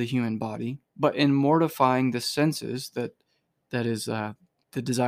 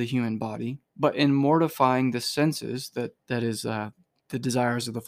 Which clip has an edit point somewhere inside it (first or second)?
second